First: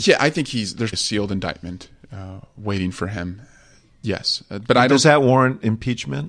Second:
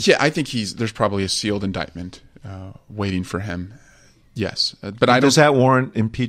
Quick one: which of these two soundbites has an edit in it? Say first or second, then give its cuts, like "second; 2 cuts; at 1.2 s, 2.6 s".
first; 1 cut; at 0.9 s